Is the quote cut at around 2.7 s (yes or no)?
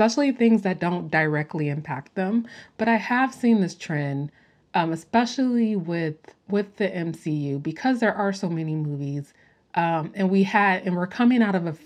no